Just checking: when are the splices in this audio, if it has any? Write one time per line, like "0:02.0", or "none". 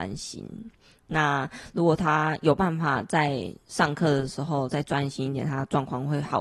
0:03.6